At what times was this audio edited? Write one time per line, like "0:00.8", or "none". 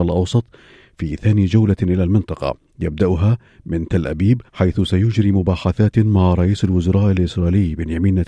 0:04.5